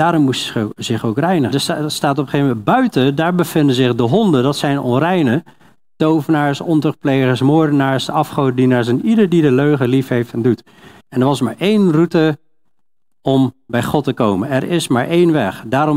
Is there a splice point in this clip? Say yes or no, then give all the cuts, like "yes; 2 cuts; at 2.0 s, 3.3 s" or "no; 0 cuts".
yes; 2 cuts; at 1.5 s, 11.0 s